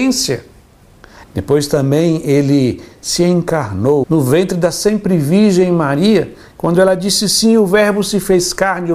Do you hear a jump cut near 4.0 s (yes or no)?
yes